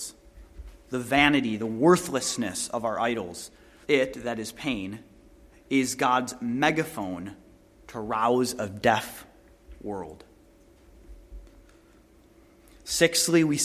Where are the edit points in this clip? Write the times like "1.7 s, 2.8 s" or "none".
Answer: 3.8 s